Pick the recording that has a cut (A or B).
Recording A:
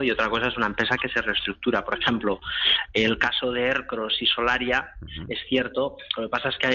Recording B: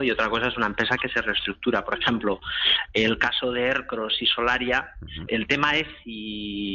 B